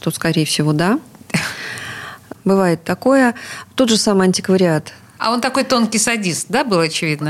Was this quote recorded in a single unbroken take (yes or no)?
no